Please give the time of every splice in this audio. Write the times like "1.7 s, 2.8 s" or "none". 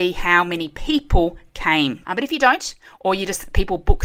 2.0 s